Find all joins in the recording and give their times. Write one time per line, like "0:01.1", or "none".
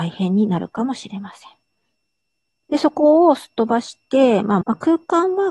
0:02.6
0:04.6

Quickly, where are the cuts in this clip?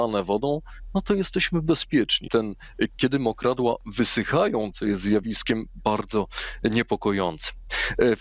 0:02.3
0:04.7

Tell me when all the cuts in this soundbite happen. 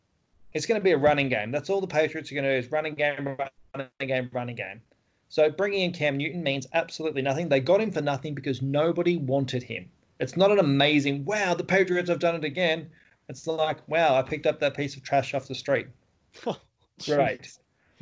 none

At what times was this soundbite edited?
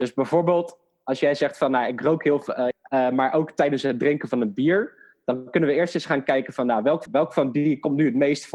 0:02.7
0:07.1

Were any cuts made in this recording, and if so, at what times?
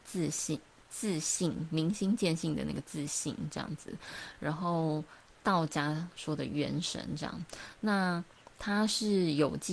none

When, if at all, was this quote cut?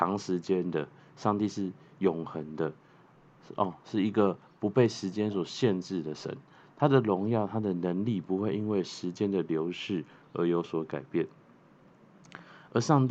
none

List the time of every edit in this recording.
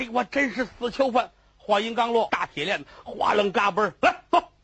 0:02.3

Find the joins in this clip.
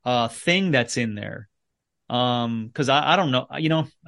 none

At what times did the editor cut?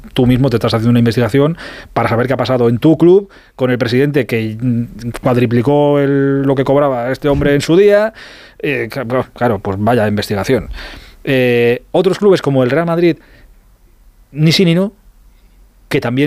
none

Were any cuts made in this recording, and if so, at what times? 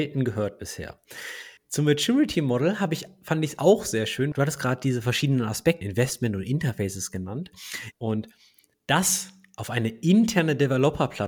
0:04.3
0:05.8
0:07.9

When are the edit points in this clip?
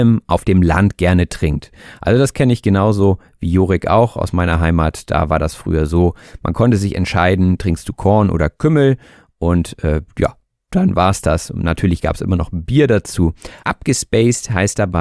0:13.6

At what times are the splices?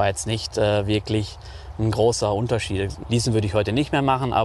0:03.0

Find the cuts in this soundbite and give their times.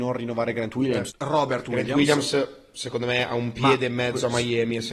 0:01.1

